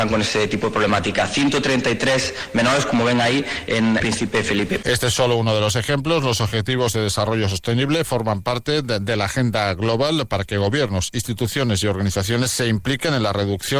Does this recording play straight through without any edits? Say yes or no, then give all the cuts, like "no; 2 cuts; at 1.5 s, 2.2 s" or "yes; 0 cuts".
no; 1 cut; at 4.0 s